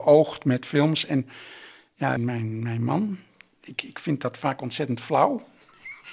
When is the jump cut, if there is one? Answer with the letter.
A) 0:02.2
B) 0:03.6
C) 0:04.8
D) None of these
A